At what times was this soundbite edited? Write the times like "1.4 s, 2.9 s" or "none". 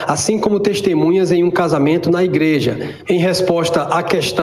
3.0 s